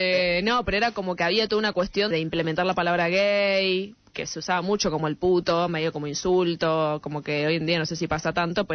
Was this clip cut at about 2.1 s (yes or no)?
yes